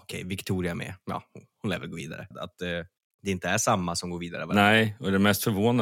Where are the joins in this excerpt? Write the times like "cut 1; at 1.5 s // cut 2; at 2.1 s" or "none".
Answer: cut 1; at 2.3 s